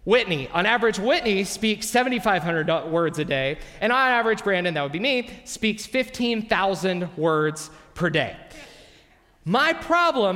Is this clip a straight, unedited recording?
yes; 0 cuts

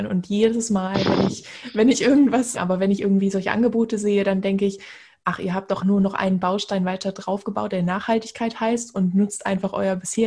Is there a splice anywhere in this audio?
yes; 2 cuts; at 2.5 s, 5.8 s

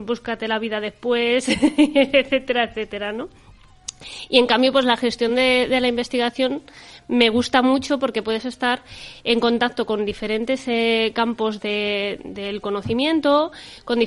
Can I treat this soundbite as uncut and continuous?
yes; 0 cuts

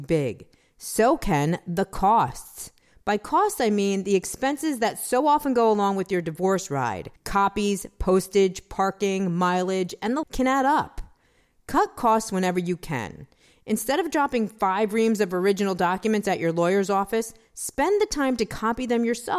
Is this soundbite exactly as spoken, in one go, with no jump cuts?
no; 2 cuts; at 7.2 s, 10.2 s

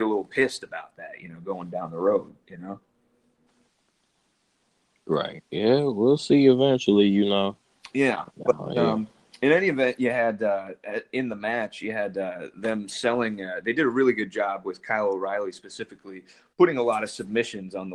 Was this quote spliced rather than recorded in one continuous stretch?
no; 0 cuts

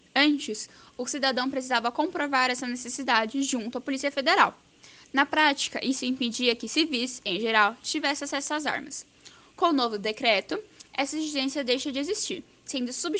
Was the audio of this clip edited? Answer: no; 0 cuts

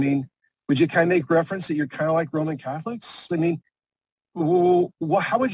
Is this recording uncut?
no; 1 cut; at 3.3 s

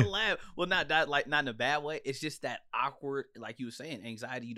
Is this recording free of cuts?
yes; 0 cuts

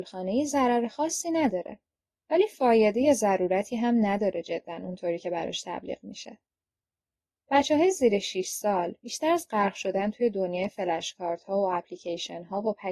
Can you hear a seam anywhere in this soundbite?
no; 0 cuts

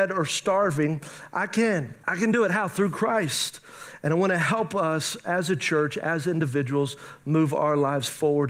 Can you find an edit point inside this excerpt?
yes; 1 cut; at 2.0 s

